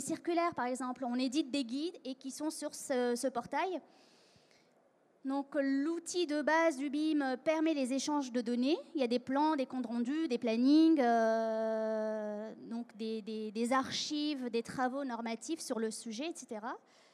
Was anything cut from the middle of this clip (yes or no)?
no